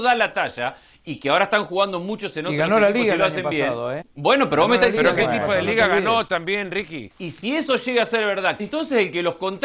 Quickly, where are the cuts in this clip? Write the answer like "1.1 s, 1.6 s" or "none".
4.0 s, 7.1 s, 8.6 s